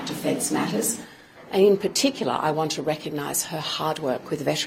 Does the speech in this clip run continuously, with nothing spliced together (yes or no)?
yes